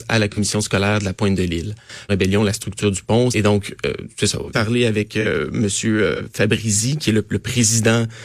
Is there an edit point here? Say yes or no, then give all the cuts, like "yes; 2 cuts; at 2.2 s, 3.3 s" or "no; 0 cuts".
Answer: yes; 3 cuts; at 2.1 s, 3.3 s, 4.5 s